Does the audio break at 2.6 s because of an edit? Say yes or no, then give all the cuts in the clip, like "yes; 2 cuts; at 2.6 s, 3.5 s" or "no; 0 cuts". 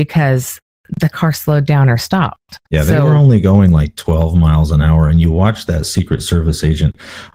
yes; 1 cut; at 2.6 s